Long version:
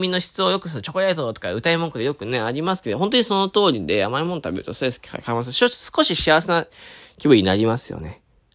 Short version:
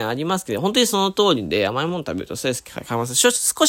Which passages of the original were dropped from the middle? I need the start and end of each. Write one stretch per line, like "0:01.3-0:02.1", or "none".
none